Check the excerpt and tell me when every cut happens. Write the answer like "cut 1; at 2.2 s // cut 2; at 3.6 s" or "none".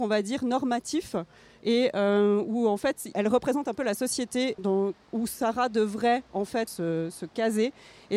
cut 1; at 3.1 s // cut 2; at 4.6 s // cut 3; at 6.7 s